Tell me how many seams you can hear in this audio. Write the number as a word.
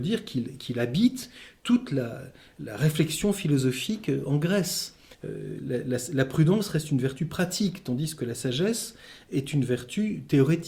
one